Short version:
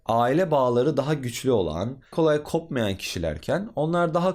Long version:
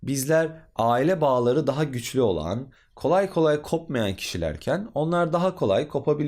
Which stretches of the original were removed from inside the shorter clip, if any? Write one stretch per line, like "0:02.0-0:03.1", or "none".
0:02.8-0:03.3